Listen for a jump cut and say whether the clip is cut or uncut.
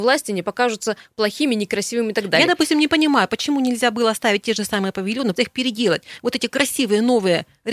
cut